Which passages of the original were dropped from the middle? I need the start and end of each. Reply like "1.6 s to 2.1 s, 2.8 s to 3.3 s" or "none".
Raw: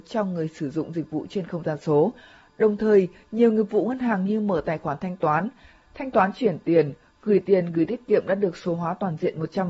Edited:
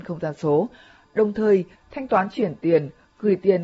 3.2 s to 5.8 s